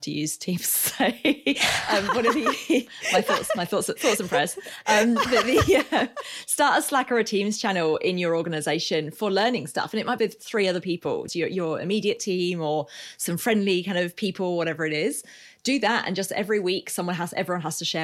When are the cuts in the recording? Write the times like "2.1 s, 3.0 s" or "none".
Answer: 10.2 s, 11.3 s